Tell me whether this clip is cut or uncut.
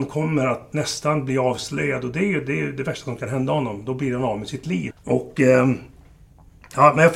cut